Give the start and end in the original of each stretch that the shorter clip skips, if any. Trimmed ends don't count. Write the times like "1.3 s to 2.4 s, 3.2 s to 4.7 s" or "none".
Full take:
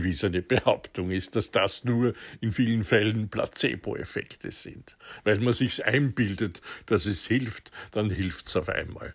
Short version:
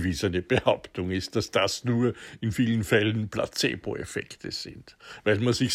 none